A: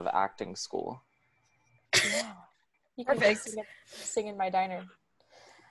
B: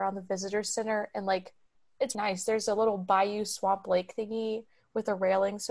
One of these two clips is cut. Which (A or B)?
B